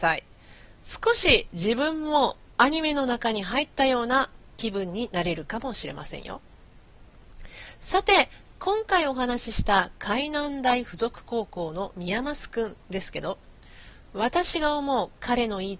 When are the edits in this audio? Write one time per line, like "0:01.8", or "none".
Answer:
none